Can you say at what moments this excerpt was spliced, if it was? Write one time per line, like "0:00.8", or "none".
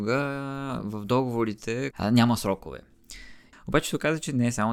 0:01.9
0:03.5